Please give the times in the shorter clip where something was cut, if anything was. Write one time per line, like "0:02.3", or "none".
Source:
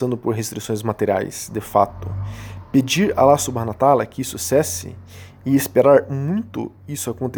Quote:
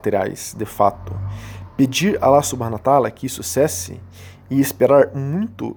none